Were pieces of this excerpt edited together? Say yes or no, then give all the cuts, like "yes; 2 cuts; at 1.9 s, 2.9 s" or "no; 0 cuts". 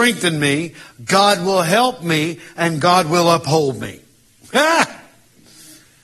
no; 0 cuts